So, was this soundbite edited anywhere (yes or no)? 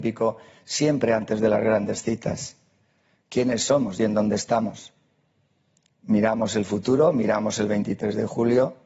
no